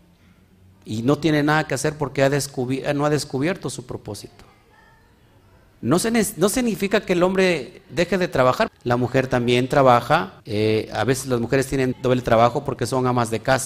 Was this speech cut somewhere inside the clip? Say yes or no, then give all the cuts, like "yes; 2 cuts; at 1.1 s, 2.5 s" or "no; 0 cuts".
yes; 3 cuts; at 8.7 s, 10.4 s, 11.9 s